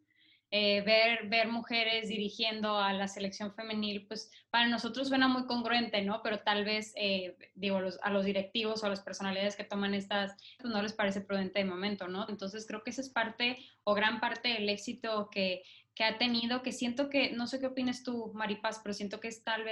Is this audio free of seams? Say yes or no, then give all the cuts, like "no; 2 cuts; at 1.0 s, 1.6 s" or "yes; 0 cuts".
no; 2 cuts; at 10.6 s, 12.3 s